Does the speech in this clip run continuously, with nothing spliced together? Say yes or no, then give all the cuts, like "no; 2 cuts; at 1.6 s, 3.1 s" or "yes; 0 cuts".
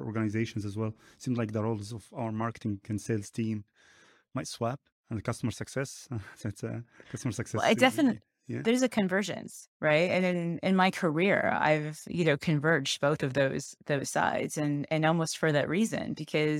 yes; 0 cuts